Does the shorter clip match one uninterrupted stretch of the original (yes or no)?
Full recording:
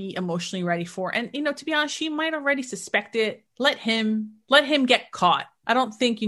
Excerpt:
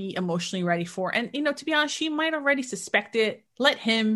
yes